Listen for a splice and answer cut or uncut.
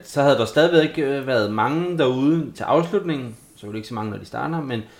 cut